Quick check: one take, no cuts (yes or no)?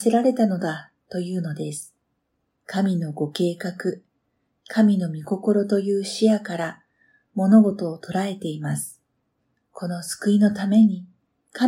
no